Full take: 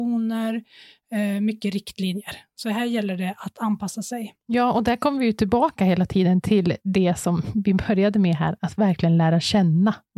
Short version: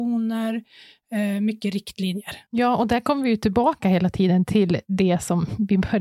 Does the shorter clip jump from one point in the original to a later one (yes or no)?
yes